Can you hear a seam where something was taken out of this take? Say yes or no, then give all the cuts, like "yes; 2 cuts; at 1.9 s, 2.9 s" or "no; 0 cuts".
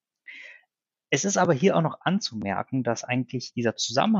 no; 0 cuts